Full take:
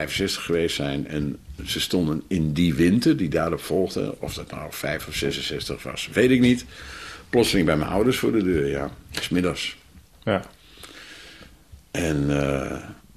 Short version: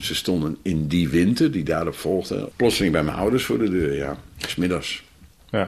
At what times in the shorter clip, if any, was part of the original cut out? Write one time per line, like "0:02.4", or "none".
0:02.5